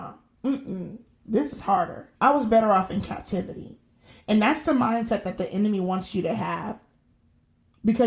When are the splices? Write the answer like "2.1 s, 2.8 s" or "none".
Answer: 2.2 s